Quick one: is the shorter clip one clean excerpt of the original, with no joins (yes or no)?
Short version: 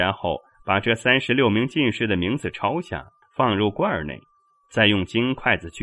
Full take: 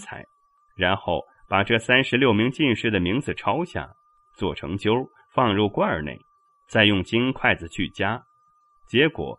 no